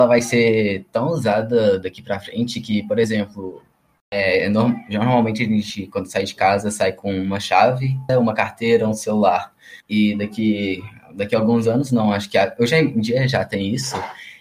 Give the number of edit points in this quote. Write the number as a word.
two